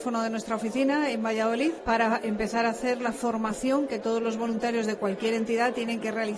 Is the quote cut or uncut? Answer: cut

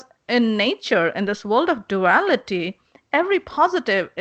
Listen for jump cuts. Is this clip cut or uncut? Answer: uncut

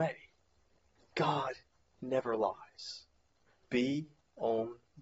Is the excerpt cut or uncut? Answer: cut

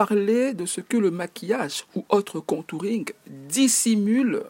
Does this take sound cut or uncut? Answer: uncut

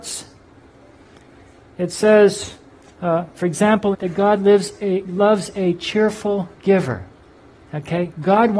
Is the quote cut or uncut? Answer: cut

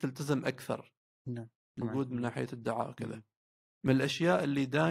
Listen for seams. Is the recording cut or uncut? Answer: cut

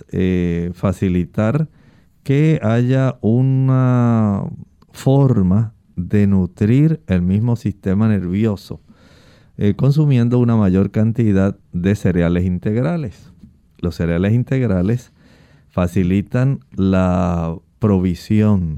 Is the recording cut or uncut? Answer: uncut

